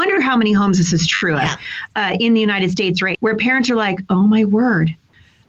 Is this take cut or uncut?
cut